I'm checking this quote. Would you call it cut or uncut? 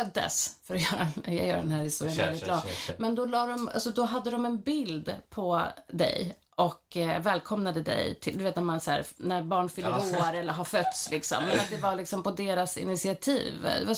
uncut